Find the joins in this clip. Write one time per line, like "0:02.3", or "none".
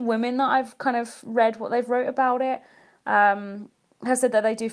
none